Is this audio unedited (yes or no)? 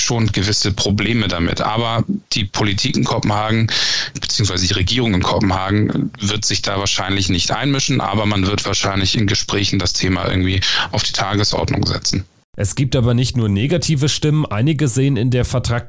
yes